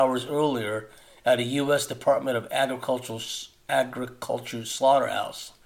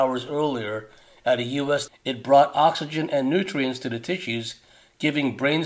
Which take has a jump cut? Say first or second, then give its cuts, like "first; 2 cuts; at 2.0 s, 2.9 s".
second; 1 cut; at 1.9 s